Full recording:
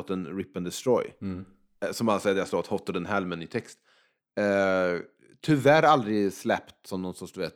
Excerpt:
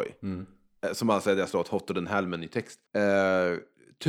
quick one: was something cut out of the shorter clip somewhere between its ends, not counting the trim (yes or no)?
yes